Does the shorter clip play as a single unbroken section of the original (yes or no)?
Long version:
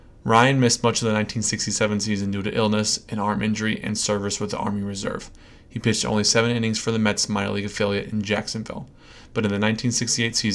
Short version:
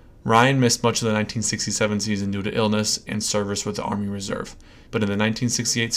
no